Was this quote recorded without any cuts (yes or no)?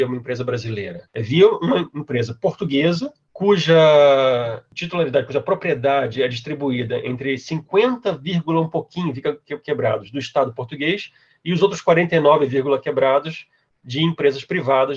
yes